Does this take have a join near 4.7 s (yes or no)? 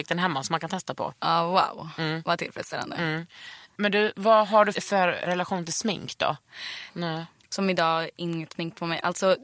yes